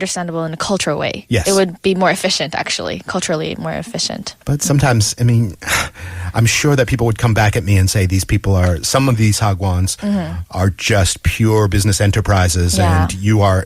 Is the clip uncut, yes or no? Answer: yes